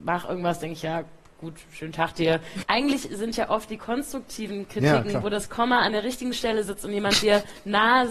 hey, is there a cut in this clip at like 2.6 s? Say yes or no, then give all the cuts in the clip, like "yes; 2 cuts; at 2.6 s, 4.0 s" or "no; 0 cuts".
yes; 1 cut; at 2.6 s